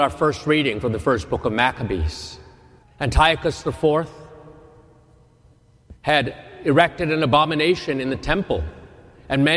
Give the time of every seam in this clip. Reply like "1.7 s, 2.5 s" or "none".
2.8 s